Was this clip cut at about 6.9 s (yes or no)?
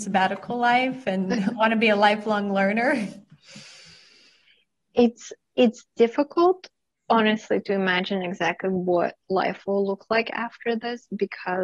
no